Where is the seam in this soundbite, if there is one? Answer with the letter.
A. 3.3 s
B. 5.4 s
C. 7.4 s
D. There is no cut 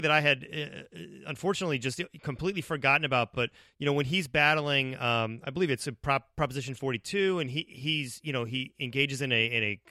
D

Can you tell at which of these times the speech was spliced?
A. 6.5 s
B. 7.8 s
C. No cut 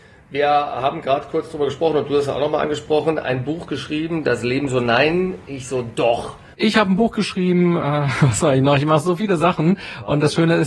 A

